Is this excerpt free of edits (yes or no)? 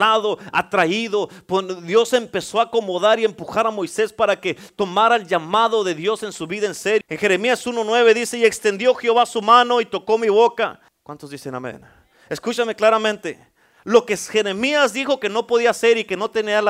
no